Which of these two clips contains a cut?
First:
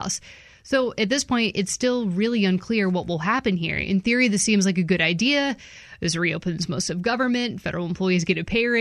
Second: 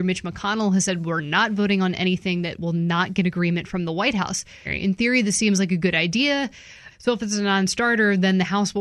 second; 2 cuts; at 4.7 s, 6.9 s

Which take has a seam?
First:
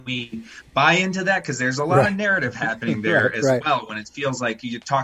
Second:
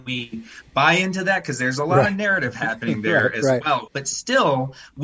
second; 1 cut; at 3.9 s

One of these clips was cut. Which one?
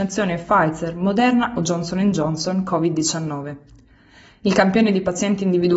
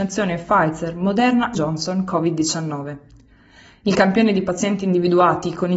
second; 1 cut; at 1.6 s

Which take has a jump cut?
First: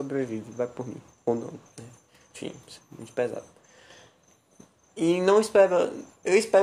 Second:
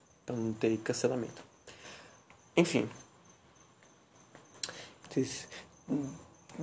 second; 1 cut; at 5.0 s

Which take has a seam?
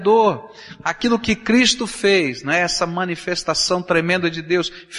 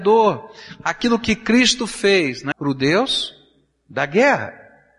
second; 1 cut; at 2.5 s

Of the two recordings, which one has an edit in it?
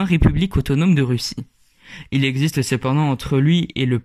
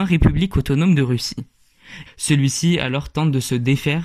second; 1 cut; at 2.1 s

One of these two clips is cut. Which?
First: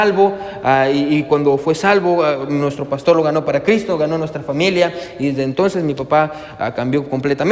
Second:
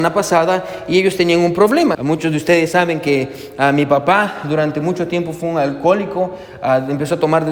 second; 1 cut; at 1.9 s

